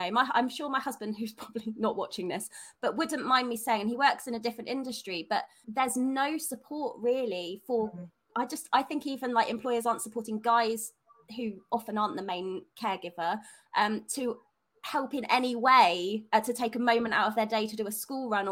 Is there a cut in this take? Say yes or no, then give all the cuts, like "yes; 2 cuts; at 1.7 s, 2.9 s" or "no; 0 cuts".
yes; 1 cut; at 5.6 s